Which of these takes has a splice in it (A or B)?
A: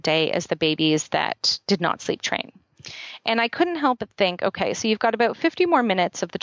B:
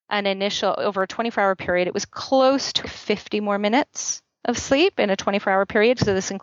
B